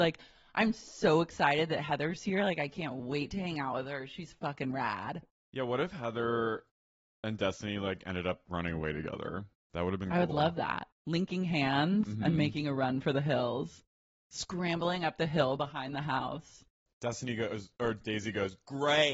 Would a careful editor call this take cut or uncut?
uncut